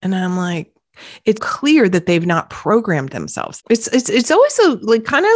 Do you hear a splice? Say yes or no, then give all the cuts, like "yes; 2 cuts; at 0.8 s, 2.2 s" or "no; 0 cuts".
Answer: yes; 2 cuts; at 1.4 s, 3.6 s